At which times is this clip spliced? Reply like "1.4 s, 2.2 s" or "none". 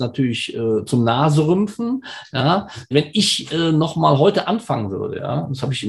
2.9 s